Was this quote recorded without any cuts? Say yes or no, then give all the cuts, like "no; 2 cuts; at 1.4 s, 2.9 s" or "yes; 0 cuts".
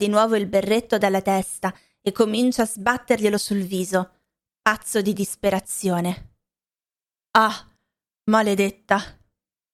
yes; 0 cuts